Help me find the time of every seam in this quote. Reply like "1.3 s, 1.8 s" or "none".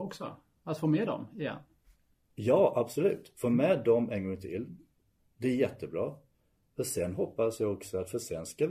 none